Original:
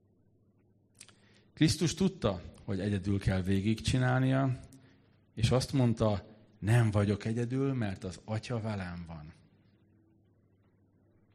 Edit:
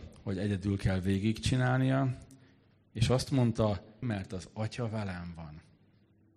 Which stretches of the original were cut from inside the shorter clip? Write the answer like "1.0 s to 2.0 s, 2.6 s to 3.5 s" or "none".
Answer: 6.4 s to 7.7 s